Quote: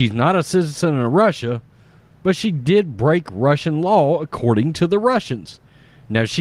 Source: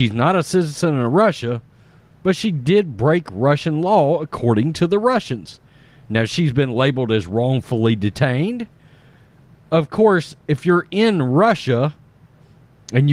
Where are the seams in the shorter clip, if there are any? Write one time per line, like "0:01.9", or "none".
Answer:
none